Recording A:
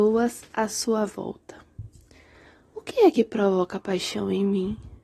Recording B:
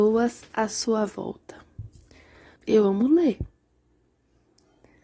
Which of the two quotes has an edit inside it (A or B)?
B